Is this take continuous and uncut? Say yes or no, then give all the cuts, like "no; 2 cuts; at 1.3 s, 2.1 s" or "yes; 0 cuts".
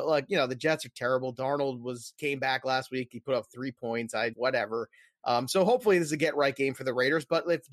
no; 1 cut; at 4.3 s